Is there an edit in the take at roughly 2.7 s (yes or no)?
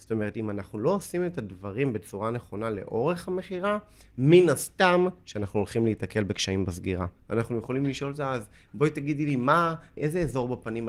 no